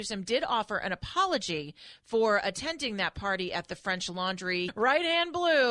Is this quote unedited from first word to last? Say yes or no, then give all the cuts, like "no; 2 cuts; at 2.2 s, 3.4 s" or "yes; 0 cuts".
no; 1 cut; at 4.7 s